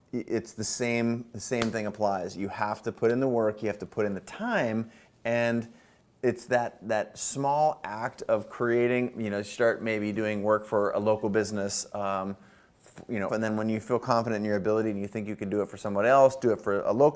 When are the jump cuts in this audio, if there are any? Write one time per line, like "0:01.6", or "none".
0:13.3